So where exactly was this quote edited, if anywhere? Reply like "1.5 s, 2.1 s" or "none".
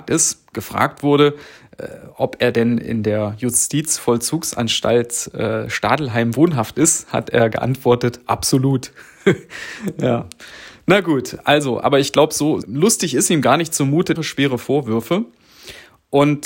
12.6 s, 14.1 s